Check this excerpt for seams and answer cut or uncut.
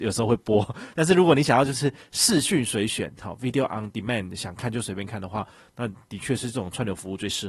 uncut